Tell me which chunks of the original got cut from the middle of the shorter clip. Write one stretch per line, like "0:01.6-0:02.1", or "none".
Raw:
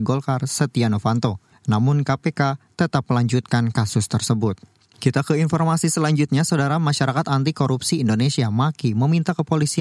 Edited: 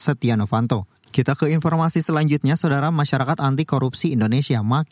0:01.5-0:04.8